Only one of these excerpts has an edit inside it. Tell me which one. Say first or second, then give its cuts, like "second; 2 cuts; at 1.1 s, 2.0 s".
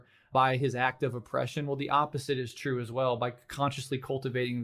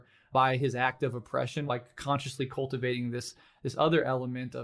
second; 1 cut; at 1.7 s